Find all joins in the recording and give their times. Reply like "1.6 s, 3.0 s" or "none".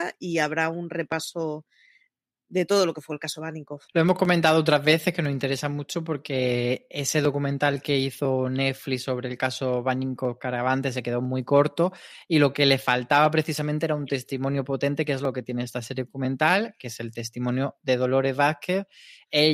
3.9 s